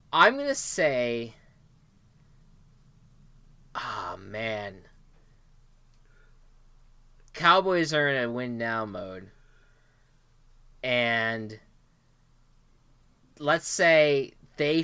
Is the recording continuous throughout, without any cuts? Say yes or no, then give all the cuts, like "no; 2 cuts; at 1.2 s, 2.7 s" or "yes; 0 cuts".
yes; 0 cuts